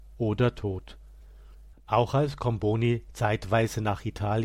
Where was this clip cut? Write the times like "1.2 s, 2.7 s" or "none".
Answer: 1.7 s